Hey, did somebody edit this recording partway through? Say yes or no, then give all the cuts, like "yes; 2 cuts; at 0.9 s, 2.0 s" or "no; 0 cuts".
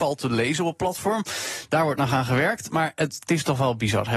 no; 0 cuts